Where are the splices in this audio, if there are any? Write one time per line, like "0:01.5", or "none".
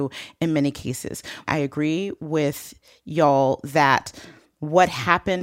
0:01.5